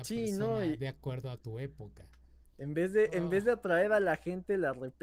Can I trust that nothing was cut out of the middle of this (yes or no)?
no